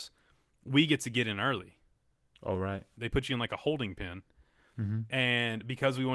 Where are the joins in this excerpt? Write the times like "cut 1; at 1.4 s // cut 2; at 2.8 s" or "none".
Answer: cut 1; at 3.0 s